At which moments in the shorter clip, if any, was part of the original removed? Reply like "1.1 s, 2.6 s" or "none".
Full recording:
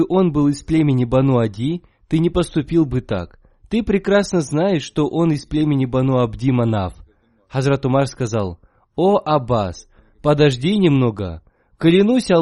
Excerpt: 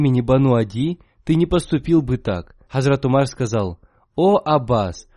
2.7 s